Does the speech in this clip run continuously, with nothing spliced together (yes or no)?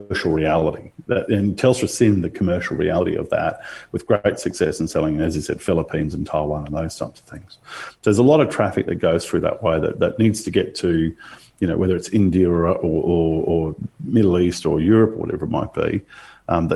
yes